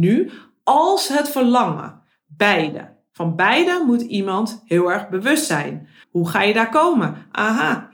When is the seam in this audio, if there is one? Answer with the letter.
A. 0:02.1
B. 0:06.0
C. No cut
B